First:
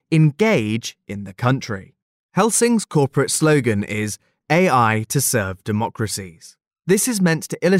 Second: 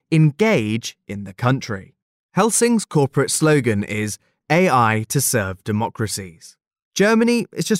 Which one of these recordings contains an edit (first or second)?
second